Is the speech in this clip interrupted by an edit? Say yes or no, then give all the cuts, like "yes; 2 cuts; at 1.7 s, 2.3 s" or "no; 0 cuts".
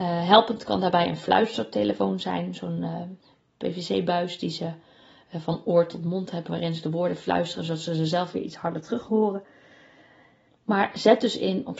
no; 0 cuts